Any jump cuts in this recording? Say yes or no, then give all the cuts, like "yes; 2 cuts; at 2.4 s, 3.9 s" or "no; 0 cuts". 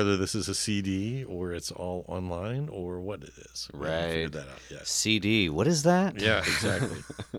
no; 0 cuts